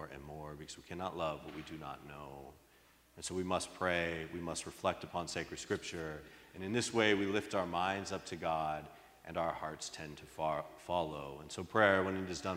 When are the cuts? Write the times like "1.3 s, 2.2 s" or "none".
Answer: none